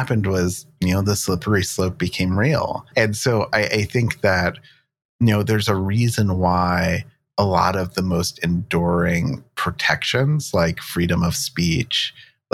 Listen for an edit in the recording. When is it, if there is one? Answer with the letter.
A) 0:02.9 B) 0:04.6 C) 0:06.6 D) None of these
A